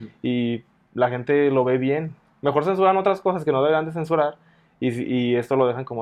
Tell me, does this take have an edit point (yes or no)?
no